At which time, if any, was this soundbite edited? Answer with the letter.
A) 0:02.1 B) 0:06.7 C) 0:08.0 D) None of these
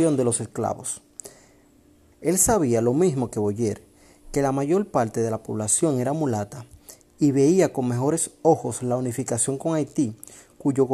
A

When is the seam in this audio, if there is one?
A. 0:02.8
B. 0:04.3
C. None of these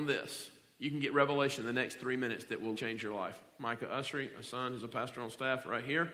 A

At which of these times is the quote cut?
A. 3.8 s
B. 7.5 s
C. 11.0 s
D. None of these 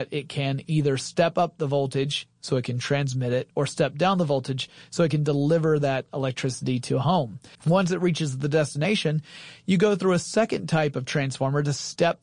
B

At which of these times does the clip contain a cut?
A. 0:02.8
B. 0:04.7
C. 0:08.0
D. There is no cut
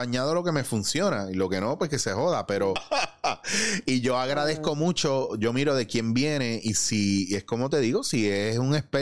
A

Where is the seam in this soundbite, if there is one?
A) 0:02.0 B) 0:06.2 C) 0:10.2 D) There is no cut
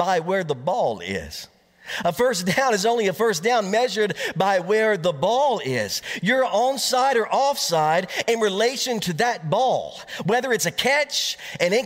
D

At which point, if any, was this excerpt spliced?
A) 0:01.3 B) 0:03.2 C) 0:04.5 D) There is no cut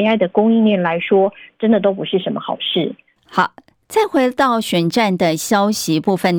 B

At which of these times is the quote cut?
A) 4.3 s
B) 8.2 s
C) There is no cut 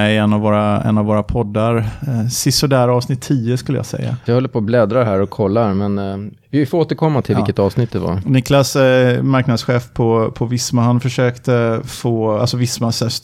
A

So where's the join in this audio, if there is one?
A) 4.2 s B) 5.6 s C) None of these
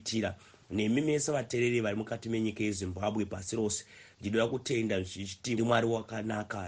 B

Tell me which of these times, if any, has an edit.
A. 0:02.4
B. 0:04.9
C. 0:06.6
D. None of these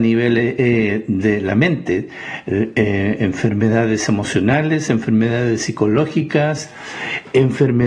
D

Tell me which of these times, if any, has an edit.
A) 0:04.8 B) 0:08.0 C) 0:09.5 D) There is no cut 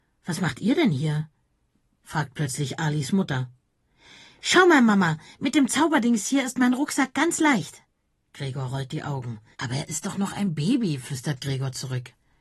C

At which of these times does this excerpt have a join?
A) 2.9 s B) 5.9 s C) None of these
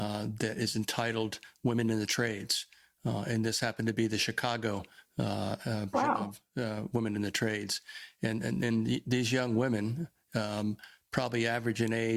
B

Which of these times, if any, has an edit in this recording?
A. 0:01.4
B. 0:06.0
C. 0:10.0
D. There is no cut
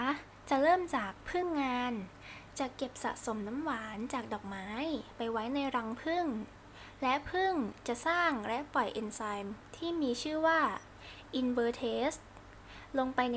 D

